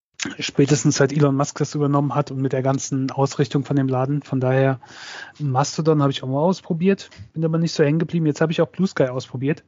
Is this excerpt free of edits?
no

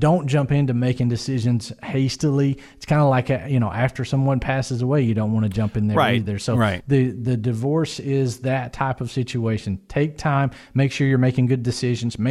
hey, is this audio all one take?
yes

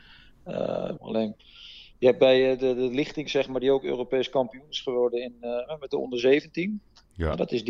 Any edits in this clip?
yes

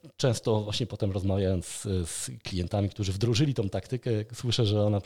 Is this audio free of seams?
yes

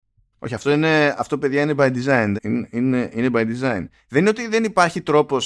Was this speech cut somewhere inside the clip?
yes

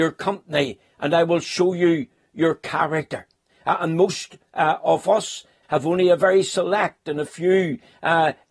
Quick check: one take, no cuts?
no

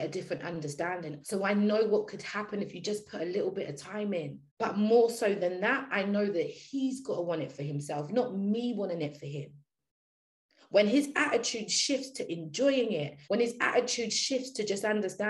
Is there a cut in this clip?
yes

